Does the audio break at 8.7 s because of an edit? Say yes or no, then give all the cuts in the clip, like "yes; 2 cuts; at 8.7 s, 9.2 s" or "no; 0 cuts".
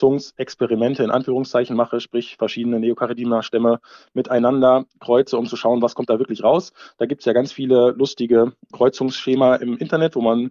yes; 1 cut; at 8.7 s